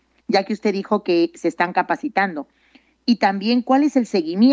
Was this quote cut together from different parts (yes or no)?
no